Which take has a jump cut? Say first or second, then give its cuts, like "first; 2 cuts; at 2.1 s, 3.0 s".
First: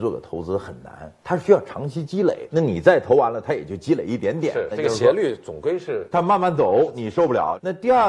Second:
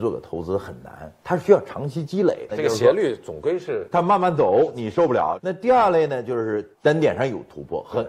second; 1 cut; at 2.5 s